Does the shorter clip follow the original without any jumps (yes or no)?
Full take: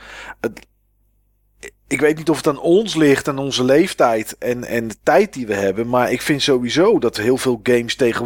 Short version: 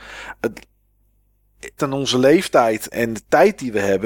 no